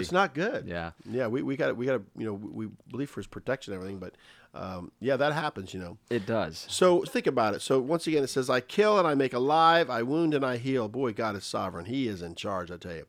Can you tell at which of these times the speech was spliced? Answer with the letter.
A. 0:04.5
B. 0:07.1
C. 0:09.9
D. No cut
B